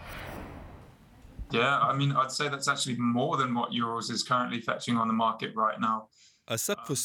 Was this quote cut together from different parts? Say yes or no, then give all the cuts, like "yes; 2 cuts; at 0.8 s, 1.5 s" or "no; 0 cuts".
no; 0 cuts